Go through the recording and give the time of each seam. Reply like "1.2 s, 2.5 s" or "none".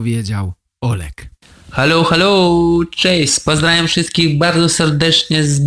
none

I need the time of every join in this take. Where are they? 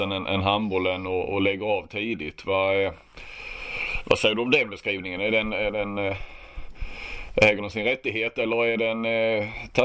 none

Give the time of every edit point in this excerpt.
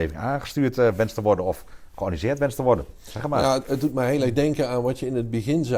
none

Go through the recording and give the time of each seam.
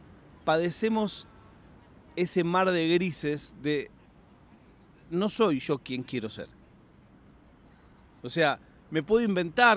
none

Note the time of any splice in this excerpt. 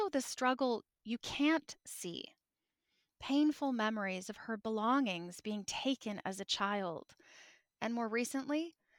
none

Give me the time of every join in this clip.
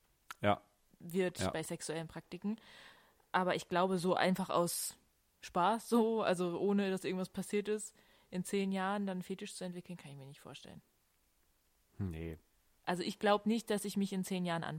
none

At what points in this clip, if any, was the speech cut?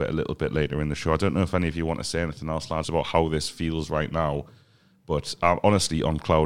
2.8 s

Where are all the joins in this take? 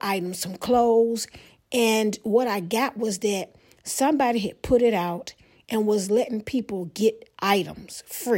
none

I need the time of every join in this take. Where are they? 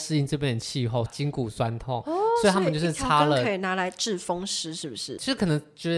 1.1 s

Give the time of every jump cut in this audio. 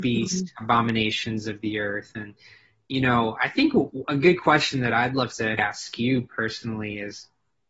5.6 s

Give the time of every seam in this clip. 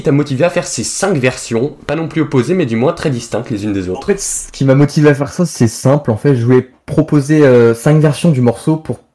none

